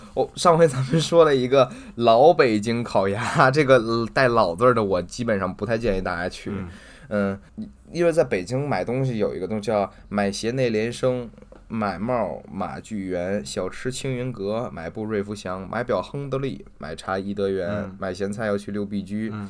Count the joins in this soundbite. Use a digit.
1